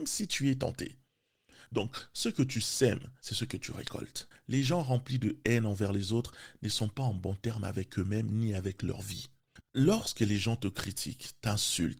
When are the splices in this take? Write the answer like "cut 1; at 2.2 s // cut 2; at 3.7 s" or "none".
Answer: cut 1; at 1.7 s // cut 2; at 4.3 s // cut 3; at 9.6 s